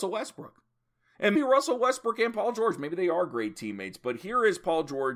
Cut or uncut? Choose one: cut